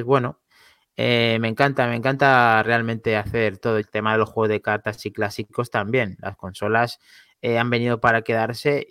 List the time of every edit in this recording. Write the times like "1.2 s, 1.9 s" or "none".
3.8 s